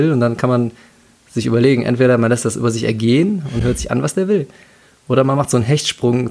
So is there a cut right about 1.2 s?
no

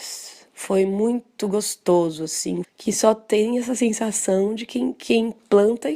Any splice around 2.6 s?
yes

